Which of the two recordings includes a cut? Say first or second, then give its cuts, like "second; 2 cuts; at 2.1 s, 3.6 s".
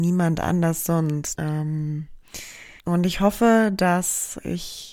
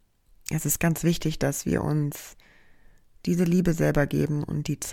first; 2 cuts; at 1.3 s, 2.8 s